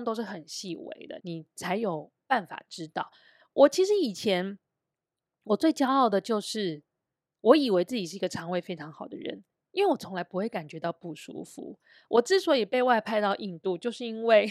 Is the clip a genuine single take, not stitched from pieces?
no; 1 cut; at 1.2 s

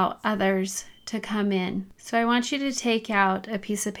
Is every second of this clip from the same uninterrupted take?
yes; 0 cuts

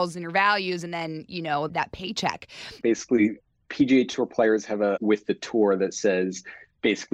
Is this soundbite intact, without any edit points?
no; 3 cuts; at 1.7 s, 2.8 s, 5.0 s

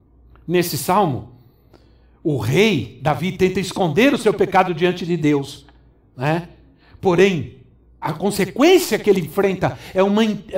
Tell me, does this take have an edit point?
yes; 1 cut; at 8.0 s

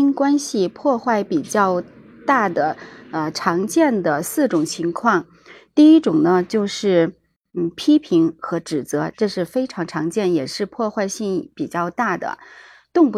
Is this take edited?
no; 0 cuts

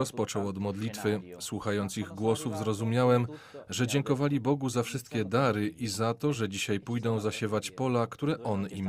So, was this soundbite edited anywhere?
no; 0 cuts

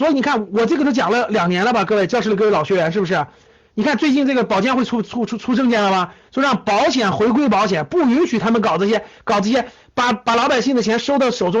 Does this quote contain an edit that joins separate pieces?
no; 0 cuts

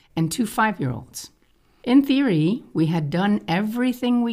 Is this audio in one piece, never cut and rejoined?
yes; 0 cuts

